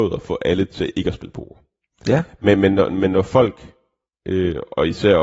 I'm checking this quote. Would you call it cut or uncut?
uncut